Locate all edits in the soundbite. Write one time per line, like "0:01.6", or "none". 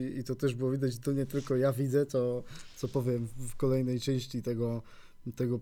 none